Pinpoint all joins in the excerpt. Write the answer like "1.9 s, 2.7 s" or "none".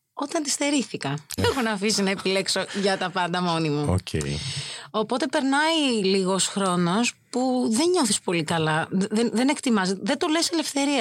1.4 s